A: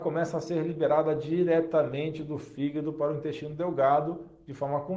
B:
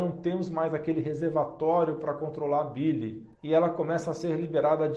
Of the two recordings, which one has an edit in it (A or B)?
B